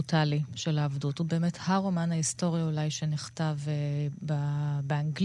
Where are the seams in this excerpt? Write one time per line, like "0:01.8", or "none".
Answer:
none